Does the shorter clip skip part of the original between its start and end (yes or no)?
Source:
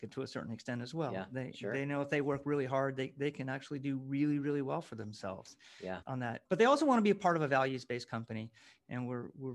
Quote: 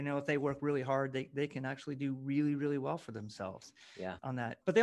no